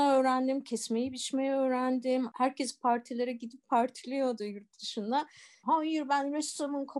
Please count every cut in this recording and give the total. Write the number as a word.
one